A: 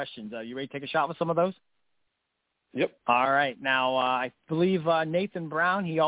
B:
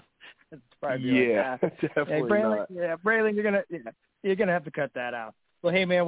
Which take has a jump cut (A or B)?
A